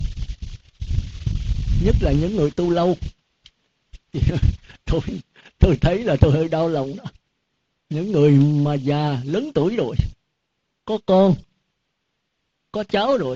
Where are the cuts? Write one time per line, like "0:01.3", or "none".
none

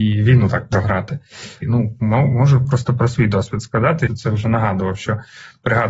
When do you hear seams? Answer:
0:01.6
0:04.1

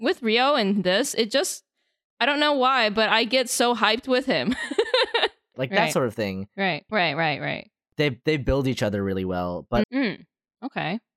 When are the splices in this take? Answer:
0:05.5
0:06.9
0:09.8

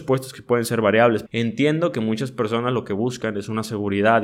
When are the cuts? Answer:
0:01.3

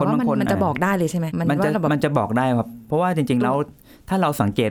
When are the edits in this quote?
0:01.3

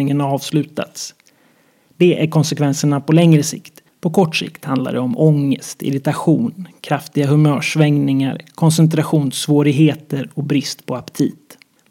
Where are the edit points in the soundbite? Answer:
none

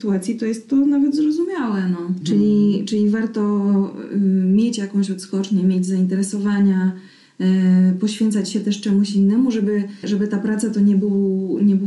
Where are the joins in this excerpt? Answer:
0:02.2
0:10.0

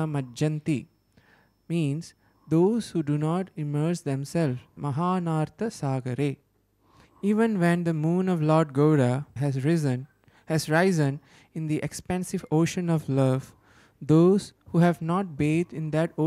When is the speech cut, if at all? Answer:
0:04.8
0:07.0
0:09.4

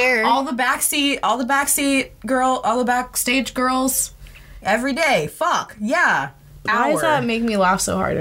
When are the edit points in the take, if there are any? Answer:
0:04.6
0:06.7

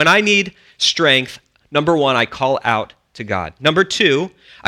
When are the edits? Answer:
none

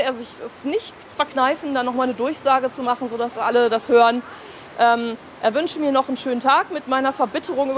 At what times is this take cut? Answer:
none

